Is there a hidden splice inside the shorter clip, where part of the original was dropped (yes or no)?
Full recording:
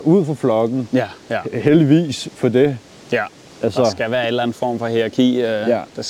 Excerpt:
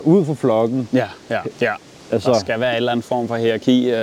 yes